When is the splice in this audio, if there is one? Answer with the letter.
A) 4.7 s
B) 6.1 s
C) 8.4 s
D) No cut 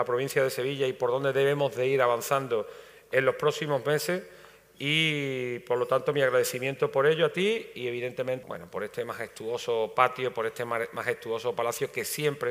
C